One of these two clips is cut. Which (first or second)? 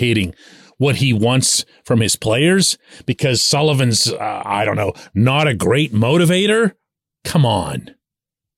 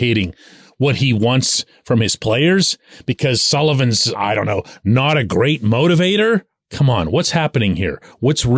second